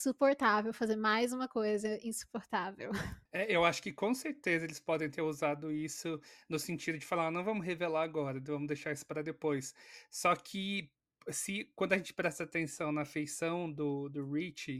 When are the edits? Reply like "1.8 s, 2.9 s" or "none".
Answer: 3.3 s